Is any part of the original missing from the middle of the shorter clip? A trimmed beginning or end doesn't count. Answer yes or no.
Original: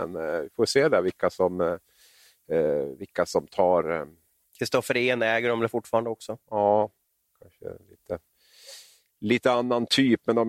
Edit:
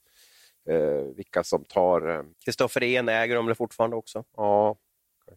yes